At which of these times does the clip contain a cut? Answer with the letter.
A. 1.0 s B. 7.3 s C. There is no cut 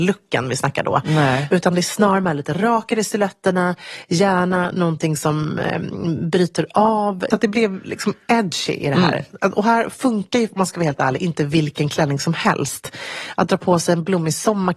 B